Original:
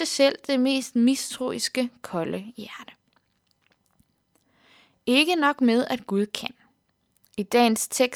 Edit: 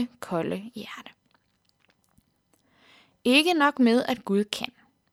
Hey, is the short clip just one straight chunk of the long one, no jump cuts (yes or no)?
yes